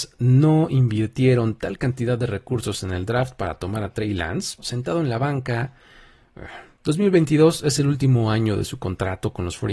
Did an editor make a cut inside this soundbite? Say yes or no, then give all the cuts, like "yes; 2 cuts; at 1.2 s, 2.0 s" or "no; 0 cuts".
yes; 2 cuts; at 4.6 s, 6.8 s